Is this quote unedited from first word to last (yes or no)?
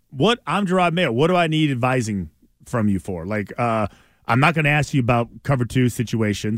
yes